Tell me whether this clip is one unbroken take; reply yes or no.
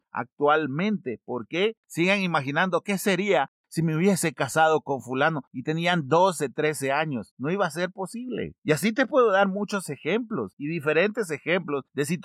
no